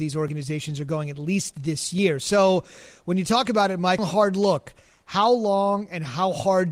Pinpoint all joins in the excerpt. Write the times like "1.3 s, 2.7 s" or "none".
4.0 s